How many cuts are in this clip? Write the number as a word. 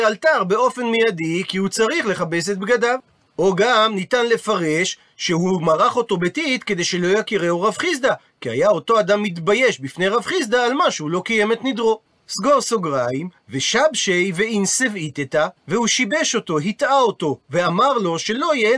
three